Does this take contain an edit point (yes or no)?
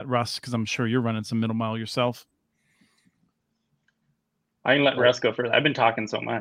no